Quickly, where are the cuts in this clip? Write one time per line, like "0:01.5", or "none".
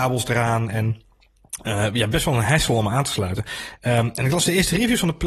none